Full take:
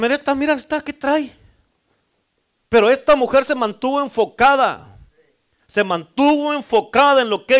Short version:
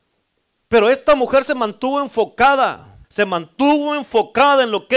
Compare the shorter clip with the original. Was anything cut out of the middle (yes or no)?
yes